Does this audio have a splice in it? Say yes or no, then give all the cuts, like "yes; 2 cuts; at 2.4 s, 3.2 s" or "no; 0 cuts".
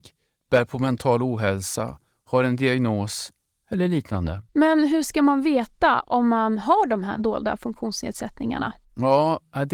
yes; 1 cut; at 4.5 s